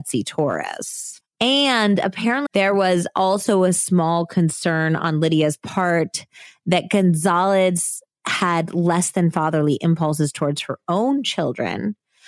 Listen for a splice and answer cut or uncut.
cut